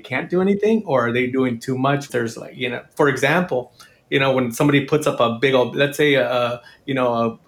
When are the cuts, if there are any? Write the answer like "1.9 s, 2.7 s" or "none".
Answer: 2.1 s